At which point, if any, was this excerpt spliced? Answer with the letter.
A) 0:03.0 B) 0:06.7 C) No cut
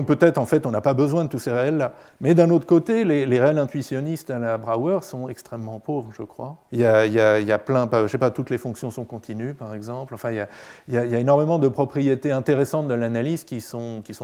B